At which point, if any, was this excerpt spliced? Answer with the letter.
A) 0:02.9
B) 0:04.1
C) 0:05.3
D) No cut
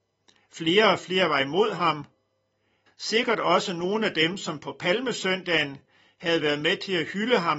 A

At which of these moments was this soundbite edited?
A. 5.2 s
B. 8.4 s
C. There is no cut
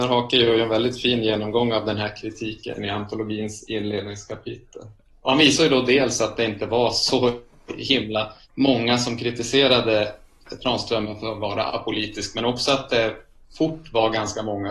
B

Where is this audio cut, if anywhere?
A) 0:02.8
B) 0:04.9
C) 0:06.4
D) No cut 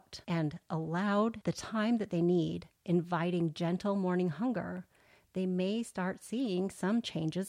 D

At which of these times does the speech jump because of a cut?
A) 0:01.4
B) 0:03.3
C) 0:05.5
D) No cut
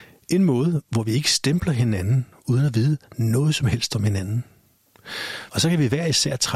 C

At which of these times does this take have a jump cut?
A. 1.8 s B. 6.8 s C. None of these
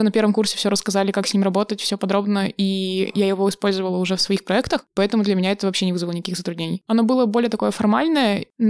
B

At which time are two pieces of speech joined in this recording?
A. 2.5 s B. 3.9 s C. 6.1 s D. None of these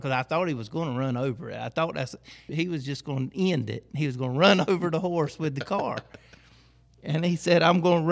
A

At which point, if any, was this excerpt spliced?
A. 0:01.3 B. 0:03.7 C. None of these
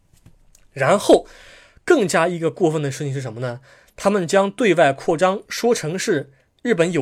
C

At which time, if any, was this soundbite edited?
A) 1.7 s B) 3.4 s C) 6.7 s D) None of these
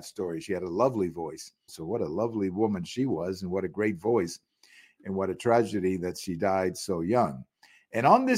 A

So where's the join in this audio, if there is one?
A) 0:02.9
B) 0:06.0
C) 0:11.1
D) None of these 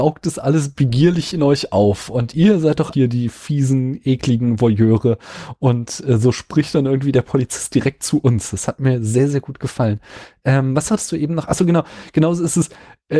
A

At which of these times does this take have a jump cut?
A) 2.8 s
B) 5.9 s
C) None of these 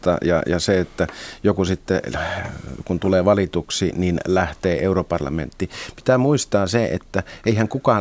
C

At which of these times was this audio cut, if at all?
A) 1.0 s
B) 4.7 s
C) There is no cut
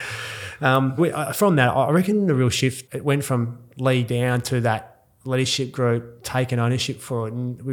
A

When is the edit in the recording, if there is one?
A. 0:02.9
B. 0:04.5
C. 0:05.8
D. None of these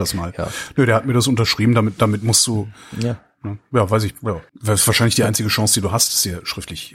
B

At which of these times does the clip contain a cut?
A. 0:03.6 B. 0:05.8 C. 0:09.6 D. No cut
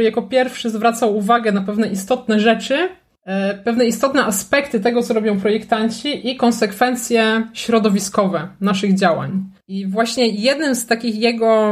C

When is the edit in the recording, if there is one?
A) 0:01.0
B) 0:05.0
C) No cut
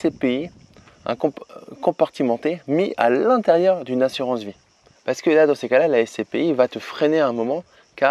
B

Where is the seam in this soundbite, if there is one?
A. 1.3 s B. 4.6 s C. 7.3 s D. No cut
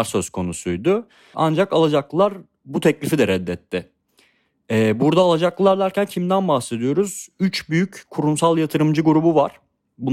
A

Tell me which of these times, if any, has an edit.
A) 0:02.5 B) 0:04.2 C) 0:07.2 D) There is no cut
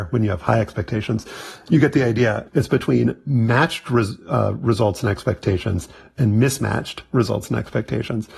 A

